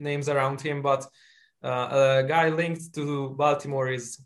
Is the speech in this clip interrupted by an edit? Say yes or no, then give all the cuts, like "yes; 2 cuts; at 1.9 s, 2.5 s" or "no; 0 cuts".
no; 0 cuts